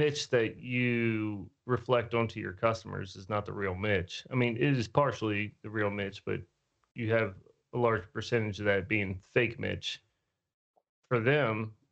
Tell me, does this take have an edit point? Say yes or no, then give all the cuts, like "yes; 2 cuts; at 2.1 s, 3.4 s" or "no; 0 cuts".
no; 0 cuts